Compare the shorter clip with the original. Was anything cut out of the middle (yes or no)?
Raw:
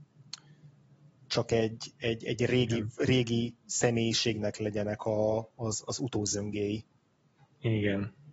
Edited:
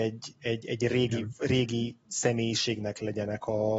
no